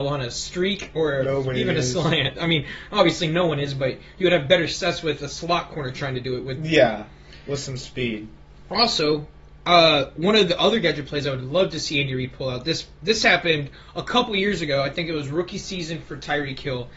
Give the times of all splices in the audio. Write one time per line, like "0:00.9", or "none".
none